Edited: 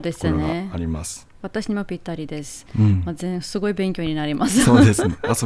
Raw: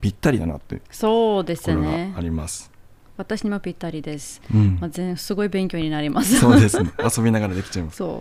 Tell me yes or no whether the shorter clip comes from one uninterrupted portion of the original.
no